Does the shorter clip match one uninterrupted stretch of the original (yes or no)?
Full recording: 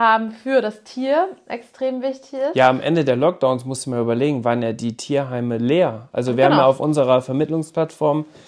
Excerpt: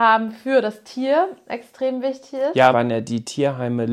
no